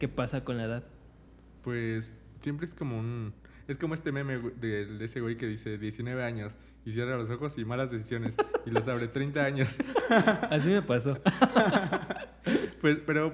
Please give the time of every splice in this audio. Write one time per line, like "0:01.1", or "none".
none